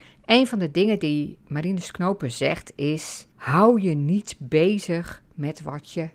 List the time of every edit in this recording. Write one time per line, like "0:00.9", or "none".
0:03.3